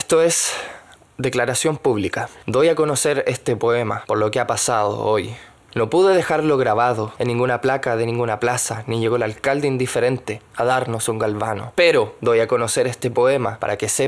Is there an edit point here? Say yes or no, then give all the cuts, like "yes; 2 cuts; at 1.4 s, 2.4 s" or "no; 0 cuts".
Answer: no; 0 cuts